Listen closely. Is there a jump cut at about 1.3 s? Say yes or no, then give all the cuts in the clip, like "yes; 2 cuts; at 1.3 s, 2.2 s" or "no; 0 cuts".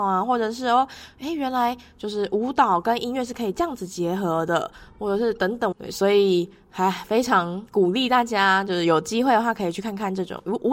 no; 1 cut; at 5.7 s